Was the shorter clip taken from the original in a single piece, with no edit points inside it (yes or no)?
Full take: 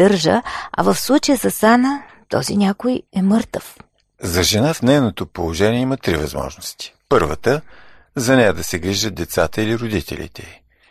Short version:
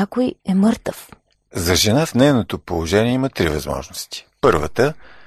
yes